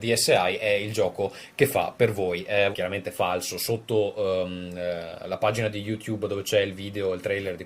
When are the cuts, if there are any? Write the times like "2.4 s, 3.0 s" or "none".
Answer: 2.7 s